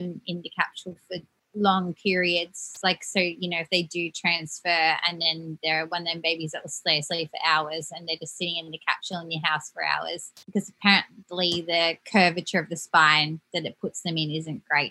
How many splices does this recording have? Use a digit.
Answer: 1